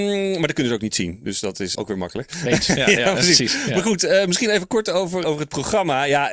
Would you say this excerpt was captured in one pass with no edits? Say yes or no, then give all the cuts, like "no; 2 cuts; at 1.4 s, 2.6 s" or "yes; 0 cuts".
no; 2 cuts; at 1.8 s, 5.2 s